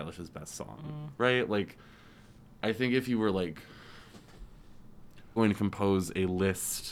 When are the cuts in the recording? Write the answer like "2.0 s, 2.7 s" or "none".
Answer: 1.2 s, 5.4 s